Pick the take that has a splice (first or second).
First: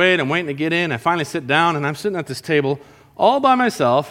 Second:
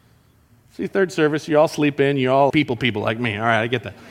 second